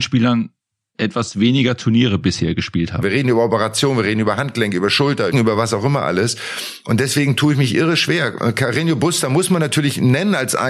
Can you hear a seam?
yes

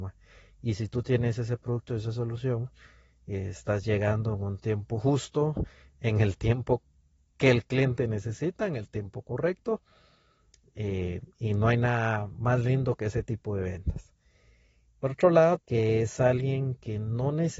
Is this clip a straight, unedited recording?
no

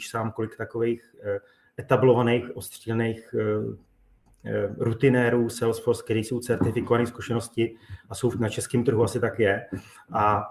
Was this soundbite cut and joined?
no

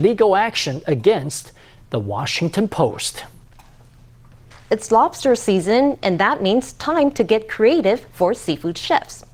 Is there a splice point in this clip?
no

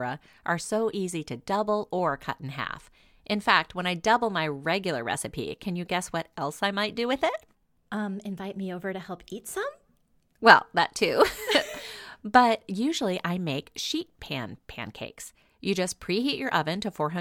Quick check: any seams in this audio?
no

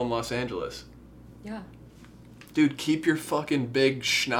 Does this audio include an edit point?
yes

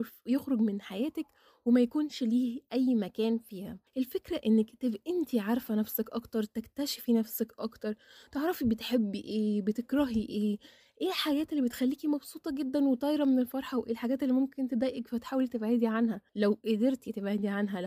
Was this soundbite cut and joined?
yes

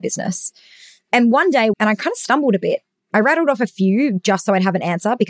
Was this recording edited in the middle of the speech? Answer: yes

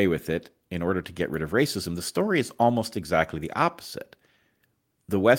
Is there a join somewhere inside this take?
no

